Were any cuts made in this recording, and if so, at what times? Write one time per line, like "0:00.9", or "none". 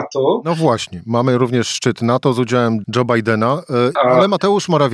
0:02.8
0:04.0